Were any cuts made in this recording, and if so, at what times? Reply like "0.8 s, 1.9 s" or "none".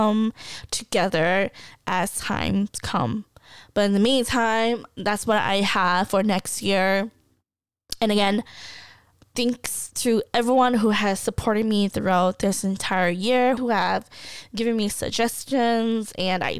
13.6 s